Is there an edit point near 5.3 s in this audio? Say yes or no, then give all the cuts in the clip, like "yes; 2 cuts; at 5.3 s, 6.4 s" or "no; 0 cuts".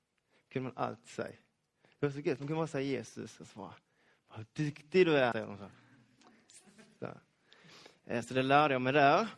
yes; 1 cut; at 5.3 s